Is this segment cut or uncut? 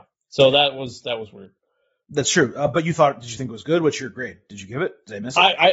uncut